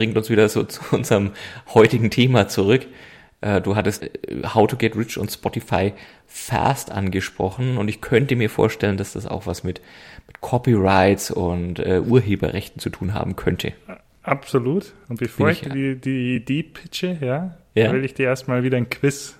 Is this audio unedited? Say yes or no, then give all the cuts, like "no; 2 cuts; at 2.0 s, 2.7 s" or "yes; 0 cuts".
yes; 0 cuts